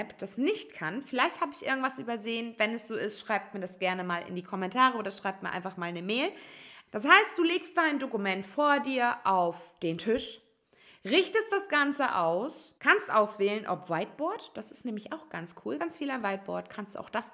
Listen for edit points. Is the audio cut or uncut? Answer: cut